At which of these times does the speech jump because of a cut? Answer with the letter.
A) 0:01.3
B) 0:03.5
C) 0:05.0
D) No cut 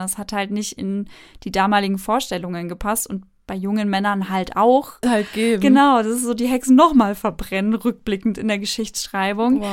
C